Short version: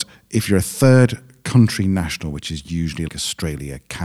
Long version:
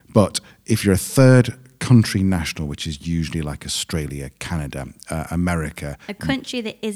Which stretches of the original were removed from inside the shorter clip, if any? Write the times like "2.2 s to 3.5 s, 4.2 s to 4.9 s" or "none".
3.4 s to 3.6 s